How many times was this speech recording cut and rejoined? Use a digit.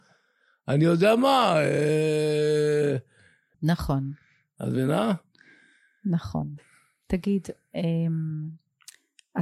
1